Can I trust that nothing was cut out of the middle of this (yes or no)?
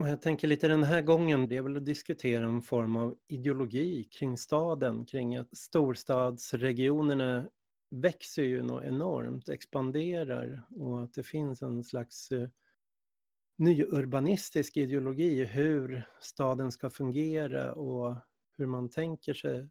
no